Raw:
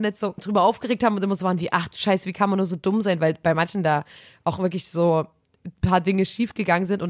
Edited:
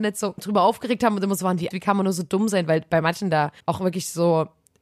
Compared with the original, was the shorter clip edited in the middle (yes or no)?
yes